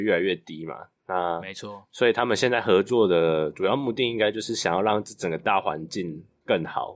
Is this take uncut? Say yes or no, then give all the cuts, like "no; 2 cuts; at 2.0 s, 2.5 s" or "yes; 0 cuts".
yes; 0 cuts